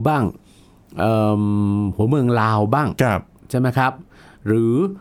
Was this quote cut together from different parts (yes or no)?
no